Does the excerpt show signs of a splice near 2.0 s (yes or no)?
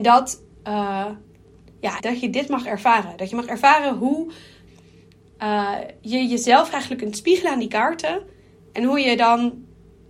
yes